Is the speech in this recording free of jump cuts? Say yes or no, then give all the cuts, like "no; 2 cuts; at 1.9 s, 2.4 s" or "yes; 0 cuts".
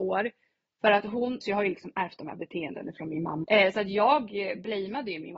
no; 2 cuts; at 1.4 s, 3.4 s